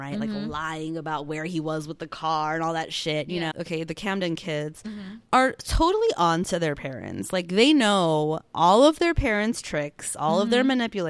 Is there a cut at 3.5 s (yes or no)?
yes